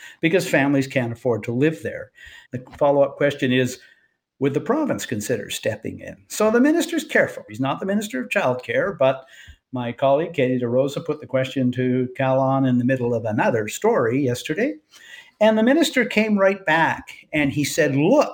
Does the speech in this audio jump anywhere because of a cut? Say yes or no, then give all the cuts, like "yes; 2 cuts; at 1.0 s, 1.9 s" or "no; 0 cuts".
yes; 2 cuts; at 2.4 s, 7.5 s